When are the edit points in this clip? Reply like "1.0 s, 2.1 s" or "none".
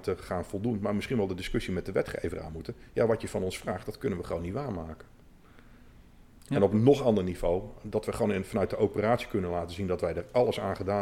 none